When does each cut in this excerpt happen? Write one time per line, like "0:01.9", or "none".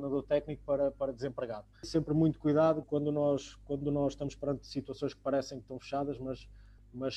0:01.8
0:02.8